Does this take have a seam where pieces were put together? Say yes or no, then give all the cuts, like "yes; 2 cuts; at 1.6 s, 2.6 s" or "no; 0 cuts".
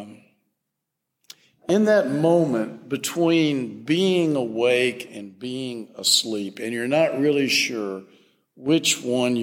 no; 0 cuts